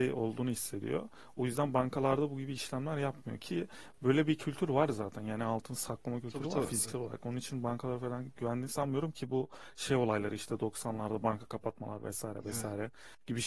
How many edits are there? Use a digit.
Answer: 0